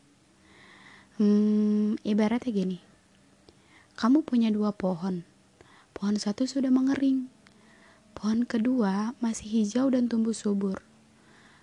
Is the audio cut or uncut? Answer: uncut